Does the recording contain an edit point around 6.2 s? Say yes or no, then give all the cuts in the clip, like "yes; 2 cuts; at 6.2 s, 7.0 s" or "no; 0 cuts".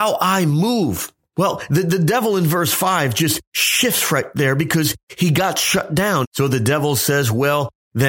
yes; 1 cut; at 6.2 s